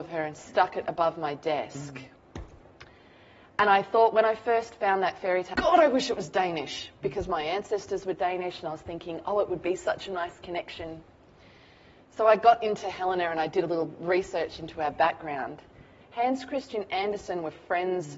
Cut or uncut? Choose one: cut